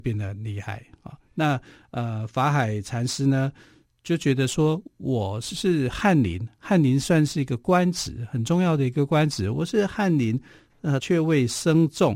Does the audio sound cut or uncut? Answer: cut